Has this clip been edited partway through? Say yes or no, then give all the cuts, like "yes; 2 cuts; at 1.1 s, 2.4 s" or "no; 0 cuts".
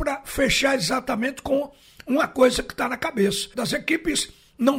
yes; 1 cut; at 3.5 s